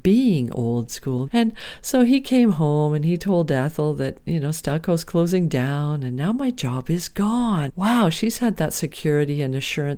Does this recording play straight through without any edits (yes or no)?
no